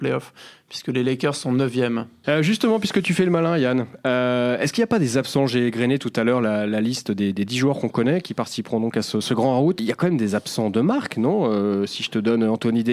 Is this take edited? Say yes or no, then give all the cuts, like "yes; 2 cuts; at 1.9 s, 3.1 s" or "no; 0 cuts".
yes; 2 cuts; at 2.2 s, 9.8 s